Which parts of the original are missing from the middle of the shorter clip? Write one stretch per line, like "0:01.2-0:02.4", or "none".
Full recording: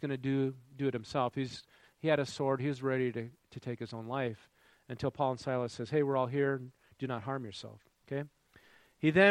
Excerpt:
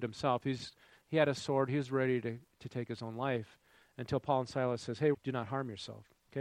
0:06.0-0:06.9